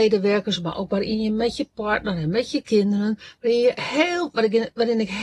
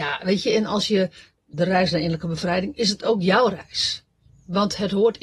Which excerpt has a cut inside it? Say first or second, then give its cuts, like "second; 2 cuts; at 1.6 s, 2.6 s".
second; 1 cut; at 1.5 s